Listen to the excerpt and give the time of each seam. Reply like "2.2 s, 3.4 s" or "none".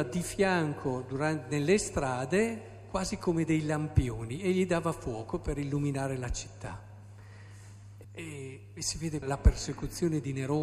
8.0 s, 9.2 s